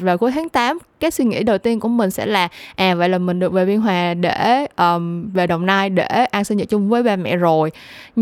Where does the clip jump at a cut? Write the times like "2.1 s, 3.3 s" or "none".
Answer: none